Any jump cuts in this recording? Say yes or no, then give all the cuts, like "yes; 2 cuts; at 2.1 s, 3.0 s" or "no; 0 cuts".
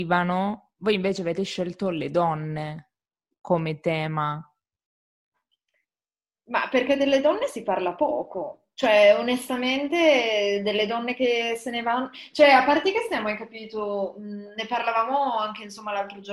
no; 0 cuts